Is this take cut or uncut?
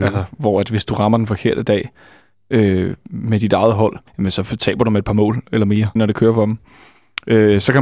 cut